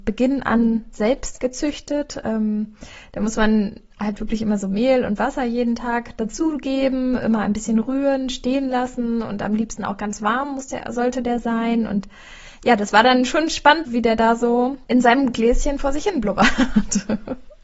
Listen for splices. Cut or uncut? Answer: cut